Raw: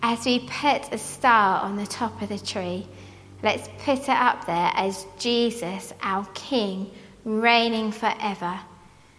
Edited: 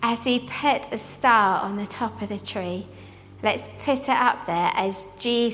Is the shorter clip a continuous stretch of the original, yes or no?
yes